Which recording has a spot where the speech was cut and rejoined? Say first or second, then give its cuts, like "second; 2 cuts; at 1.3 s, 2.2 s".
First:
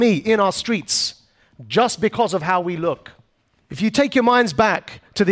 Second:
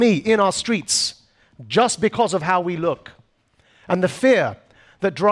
first; 1 cut; at 3.6 s